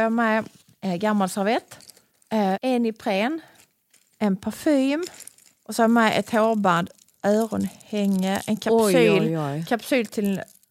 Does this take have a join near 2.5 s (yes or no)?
yes